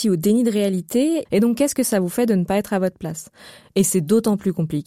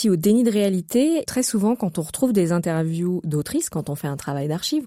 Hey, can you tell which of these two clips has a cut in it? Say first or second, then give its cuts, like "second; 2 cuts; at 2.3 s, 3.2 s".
first; 1 cut; at 1.3 s